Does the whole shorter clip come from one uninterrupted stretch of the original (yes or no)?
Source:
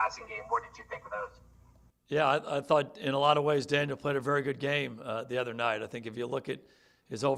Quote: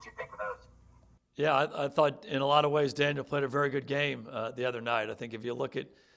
yes